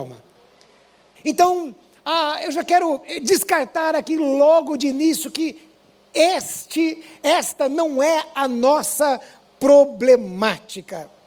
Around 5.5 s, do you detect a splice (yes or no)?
no